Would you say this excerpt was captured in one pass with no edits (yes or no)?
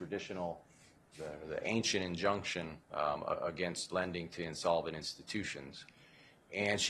no